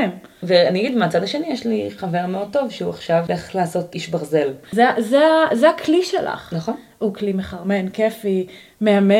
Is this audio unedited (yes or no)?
no